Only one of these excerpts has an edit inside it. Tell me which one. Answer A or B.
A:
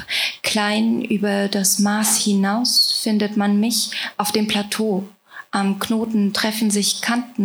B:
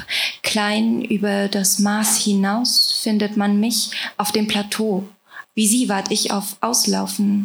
B